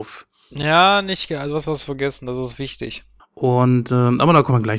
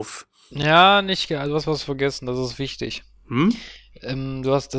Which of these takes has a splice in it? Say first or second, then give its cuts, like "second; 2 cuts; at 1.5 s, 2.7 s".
first; 1 cut; at 3.2 s